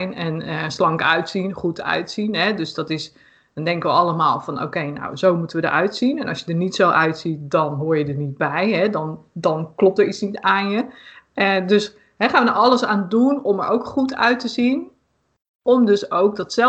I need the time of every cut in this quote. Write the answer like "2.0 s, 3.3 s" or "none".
none